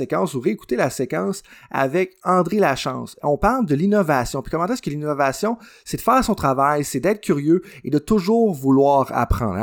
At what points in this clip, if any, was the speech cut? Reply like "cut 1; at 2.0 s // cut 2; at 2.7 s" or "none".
none